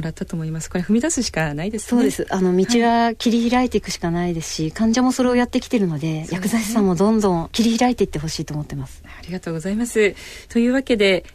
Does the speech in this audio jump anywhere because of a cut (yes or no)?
no